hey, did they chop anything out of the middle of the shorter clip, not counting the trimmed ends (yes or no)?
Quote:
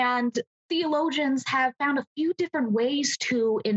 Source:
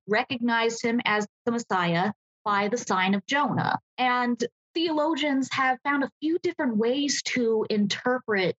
no